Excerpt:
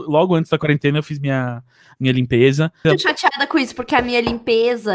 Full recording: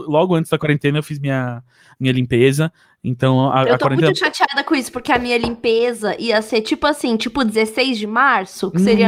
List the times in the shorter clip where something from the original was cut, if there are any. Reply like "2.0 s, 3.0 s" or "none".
2.8 s